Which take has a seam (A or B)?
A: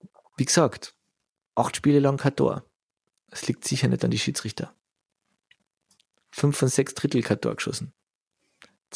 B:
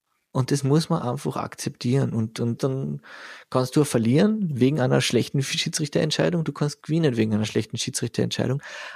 B